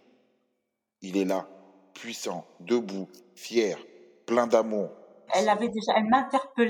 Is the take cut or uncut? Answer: cut